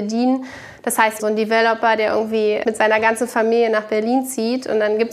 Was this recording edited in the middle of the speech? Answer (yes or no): yes